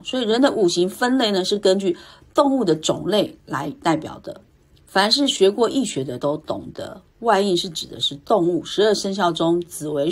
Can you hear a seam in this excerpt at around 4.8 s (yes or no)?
yes